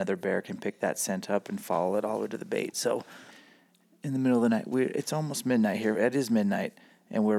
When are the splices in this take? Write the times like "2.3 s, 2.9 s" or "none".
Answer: none